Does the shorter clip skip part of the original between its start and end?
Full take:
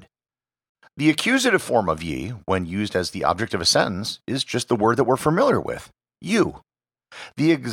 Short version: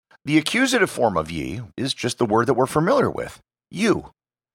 yes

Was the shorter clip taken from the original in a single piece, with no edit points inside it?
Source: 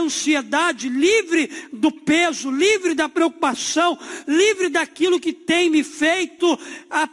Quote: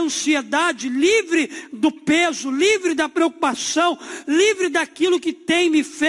yes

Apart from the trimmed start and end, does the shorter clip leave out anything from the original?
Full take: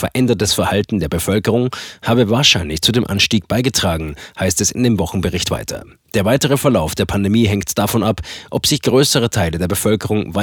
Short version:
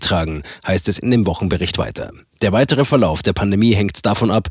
no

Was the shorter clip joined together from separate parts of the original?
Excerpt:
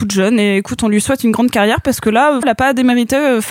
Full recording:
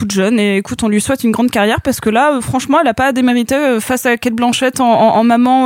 yes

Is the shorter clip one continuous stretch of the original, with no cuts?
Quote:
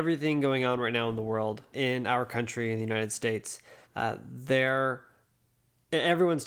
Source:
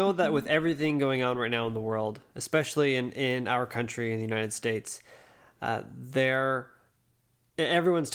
no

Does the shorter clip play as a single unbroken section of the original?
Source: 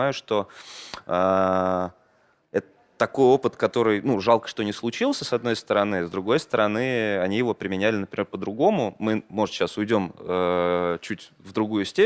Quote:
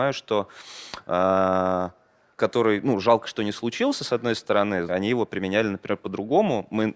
no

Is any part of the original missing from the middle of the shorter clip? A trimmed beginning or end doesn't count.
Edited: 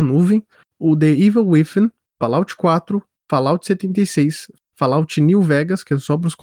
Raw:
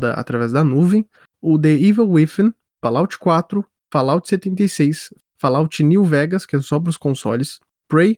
no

